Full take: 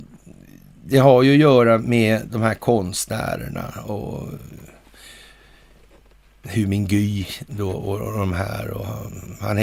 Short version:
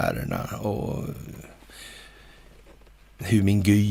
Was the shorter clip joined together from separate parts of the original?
no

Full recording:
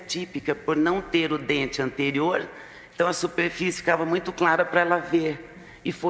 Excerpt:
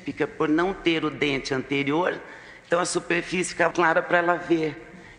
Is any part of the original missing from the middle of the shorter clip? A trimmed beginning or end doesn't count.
yes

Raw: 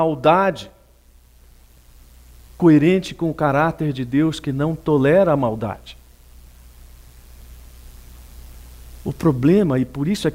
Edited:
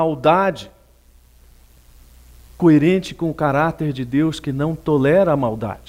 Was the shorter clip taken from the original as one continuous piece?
yes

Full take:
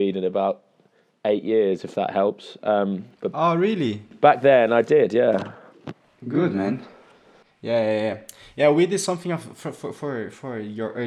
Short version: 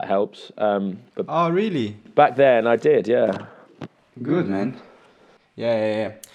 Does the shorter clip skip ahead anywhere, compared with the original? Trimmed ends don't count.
no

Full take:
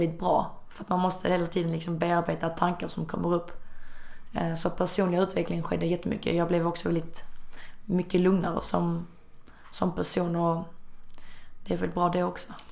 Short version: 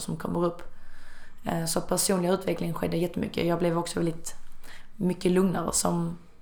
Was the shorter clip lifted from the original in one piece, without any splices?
yes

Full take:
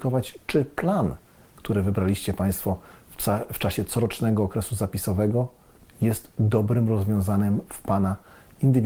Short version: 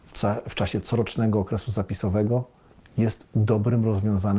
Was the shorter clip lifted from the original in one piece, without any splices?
yes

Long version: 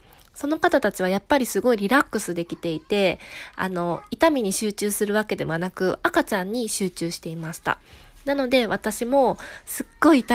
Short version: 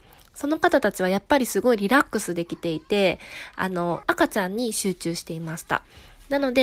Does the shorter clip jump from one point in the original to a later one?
yes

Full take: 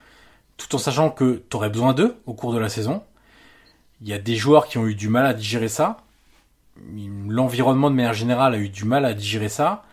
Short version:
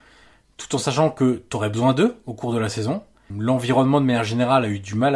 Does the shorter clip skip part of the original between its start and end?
yes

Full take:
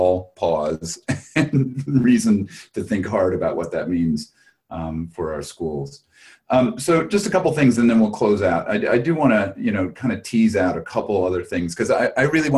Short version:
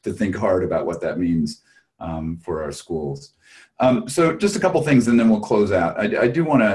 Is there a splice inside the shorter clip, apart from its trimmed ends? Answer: no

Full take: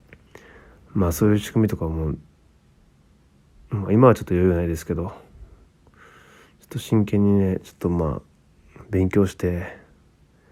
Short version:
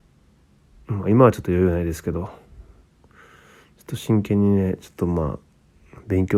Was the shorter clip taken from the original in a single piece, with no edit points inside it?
yes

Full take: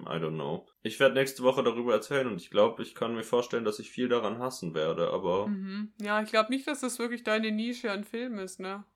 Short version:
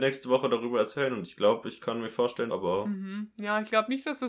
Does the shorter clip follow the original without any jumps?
no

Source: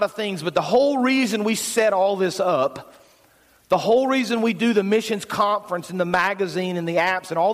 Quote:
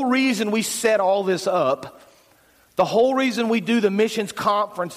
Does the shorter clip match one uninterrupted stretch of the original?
yes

